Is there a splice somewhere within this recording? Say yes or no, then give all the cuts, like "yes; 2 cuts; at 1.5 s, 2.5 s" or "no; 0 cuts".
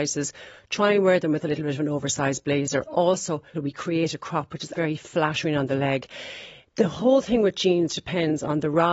yes; 2 cuts; at 3.5 s, 4.7 s